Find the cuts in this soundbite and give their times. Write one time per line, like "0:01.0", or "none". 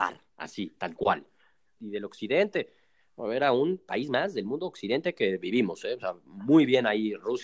0:01.8